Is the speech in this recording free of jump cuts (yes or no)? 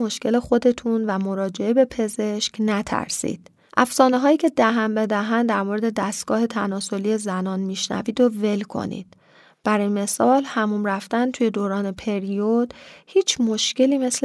yes